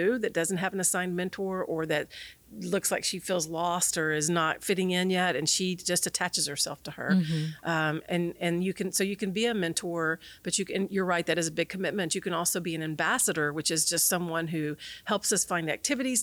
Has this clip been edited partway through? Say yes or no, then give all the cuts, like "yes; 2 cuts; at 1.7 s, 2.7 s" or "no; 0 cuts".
no; 0 cuts